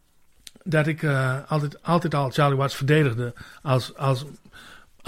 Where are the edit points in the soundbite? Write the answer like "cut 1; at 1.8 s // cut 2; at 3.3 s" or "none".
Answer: none